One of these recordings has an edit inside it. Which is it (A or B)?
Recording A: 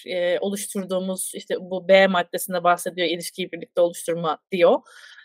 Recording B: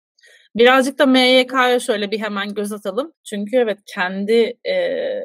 B